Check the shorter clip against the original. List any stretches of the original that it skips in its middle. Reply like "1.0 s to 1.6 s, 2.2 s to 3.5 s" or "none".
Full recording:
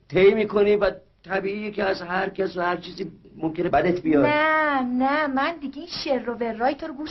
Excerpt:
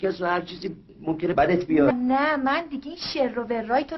4.3 s to 4.8 s